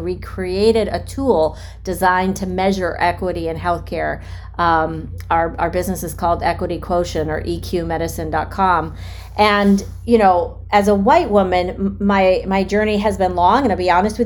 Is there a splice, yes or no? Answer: no